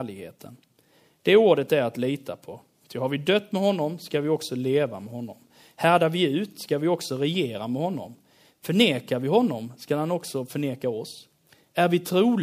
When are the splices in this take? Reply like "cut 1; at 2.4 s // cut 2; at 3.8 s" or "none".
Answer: none